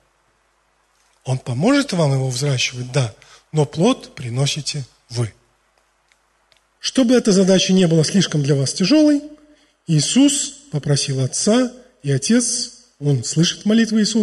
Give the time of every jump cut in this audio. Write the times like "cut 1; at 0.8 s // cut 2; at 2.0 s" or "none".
cut 1; at 6.8 s